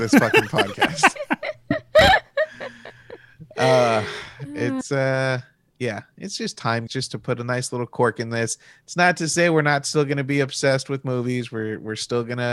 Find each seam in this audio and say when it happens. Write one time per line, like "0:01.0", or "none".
0:06.9